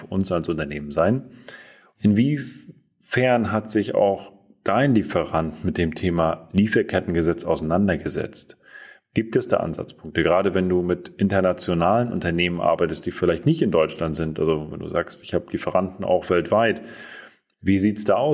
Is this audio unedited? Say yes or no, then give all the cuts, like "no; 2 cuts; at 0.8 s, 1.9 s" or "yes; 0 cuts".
yes; 0 cuts